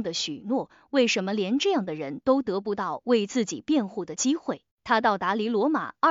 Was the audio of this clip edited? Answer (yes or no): yes